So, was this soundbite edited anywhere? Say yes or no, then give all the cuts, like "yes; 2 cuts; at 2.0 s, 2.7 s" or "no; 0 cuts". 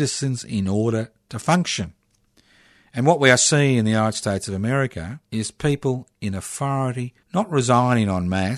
yes; 2 cuts; at 5.2 s, 7.2 s